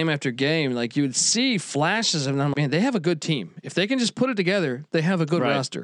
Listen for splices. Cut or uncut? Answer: cut